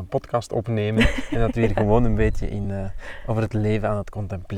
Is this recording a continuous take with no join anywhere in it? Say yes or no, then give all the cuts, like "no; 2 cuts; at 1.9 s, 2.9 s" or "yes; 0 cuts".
yes; 0 cuts